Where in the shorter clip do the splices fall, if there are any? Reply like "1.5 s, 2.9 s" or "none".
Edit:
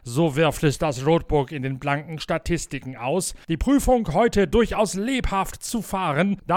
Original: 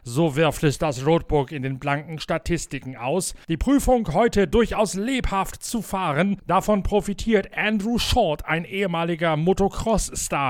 none